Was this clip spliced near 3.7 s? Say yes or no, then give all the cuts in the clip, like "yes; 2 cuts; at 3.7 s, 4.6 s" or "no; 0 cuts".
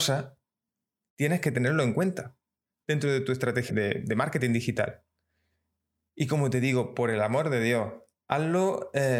yes; 1 cut; at 3.7 s